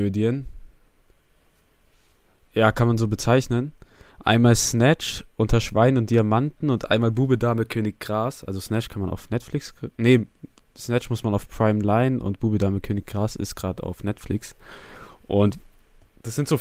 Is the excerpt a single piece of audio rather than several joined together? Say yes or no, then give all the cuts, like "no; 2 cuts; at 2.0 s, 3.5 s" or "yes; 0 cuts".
yes; 0 cuts